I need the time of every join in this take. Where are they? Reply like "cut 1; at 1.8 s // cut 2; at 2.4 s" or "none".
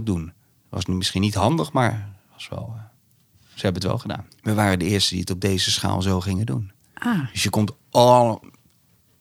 cut 1; at 4.3 s